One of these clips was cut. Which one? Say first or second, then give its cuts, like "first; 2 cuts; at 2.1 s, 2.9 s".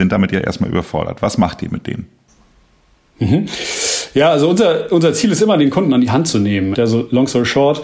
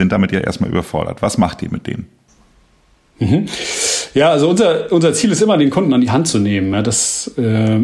first; 1 cut; at 6.7 s